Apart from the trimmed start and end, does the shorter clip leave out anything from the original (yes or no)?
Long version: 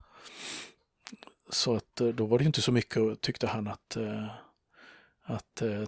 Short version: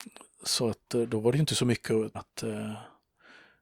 yes